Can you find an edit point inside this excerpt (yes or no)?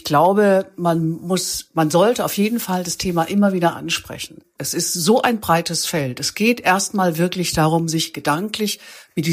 yes